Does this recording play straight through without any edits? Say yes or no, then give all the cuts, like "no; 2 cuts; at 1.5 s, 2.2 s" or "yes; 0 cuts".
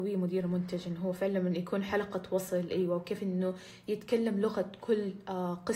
yes; 0 cuts